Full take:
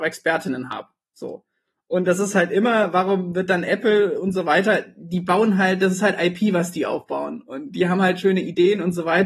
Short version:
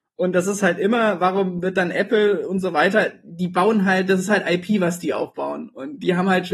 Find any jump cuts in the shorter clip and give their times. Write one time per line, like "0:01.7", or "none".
none

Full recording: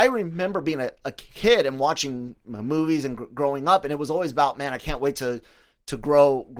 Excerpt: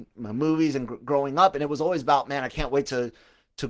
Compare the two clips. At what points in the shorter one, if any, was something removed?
none

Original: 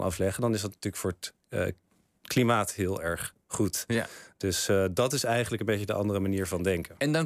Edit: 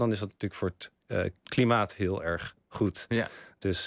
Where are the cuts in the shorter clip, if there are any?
0:01.4

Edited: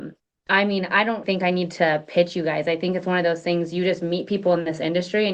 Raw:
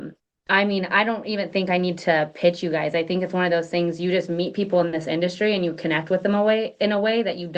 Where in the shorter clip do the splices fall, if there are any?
0:01.2

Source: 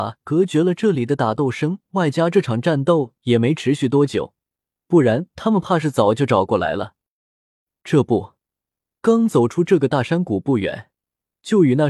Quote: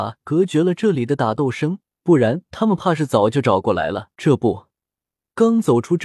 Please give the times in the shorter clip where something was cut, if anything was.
0:01.8
0:04.1

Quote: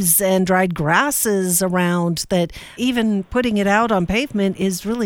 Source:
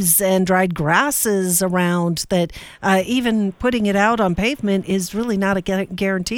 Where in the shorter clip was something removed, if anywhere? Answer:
0:02.8

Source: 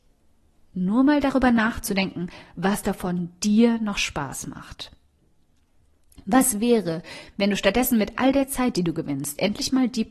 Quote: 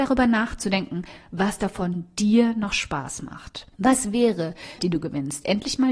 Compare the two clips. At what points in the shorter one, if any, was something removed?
0:03.7
0:04.8

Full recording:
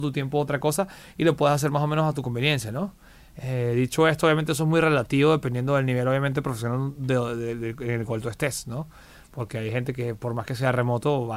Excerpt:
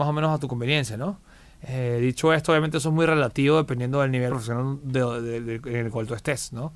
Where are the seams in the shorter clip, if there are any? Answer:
0:04.3

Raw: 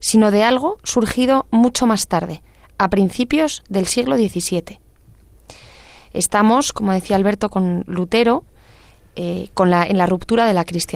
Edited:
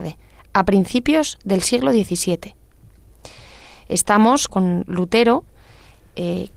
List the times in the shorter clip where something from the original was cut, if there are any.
0:04.5

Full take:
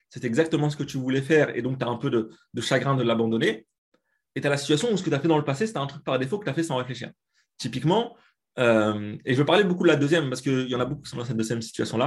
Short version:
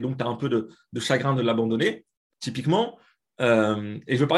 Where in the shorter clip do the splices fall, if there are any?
0:02.3

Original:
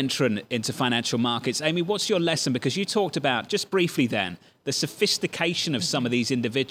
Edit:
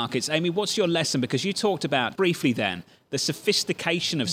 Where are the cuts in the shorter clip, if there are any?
0:02.2

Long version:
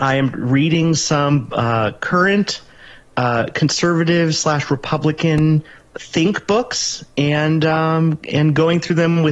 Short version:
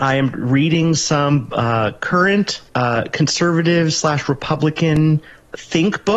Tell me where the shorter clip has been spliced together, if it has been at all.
0:02.7

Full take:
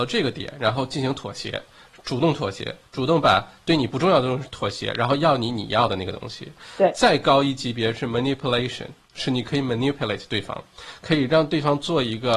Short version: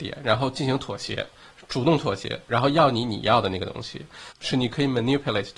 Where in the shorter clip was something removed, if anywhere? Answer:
0:02.5
0:04.3

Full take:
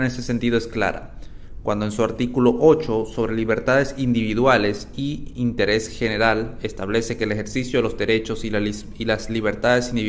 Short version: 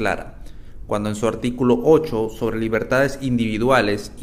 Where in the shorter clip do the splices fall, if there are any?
none

